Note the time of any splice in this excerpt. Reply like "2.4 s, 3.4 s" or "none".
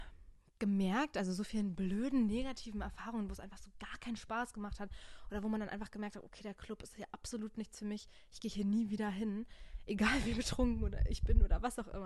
none